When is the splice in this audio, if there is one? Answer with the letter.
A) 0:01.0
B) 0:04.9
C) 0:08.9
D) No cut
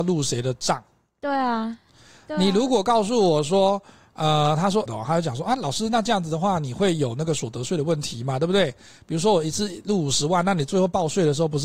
B